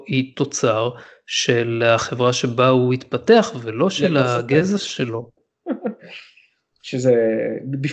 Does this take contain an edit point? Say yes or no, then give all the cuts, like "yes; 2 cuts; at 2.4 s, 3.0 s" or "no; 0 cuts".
yes; 1 cut; at 5.4 s